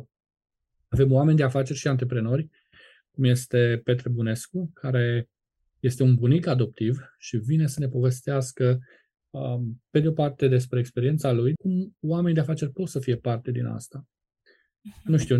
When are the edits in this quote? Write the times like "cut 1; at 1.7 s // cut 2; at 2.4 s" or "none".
cut 1; at 11.5 s